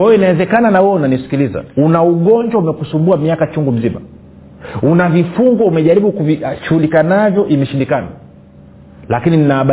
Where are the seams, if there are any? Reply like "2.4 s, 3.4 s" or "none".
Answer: 1.7 s